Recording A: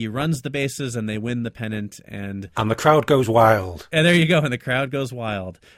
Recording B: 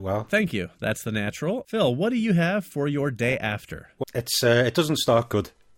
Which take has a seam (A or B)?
B